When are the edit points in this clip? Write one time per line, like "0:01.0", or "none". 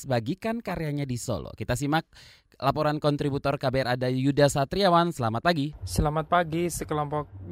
none